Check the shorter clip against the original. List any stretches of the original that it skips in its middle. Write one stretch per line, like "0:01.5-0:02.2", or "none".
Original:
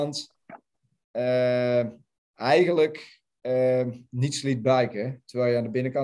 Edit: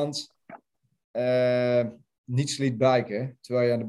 0:02.2-0:04.1